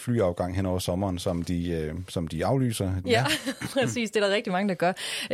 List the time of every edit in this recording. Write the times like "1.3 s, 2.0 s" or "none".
3.0 s

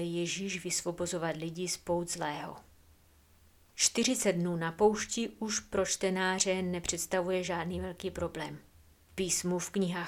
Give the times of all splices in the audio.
8.9 s

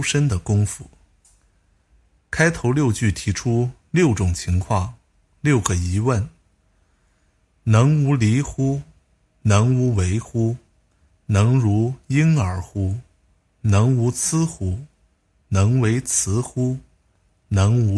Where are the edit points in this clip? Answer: none

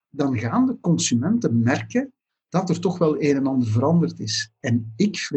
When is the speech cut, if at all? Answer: none

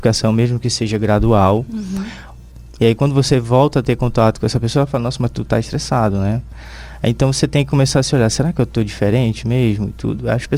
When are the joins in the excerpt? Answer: 2.8 s

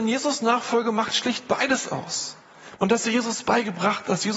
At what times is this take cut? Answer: 2.8 s

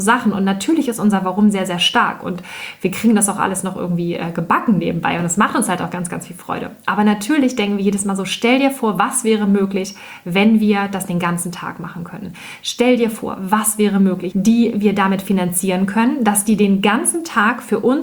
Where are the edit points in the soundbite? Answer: 14.3 s

